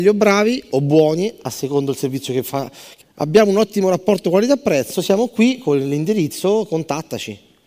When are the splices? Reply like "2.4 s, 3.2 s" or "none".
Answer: 3.0 s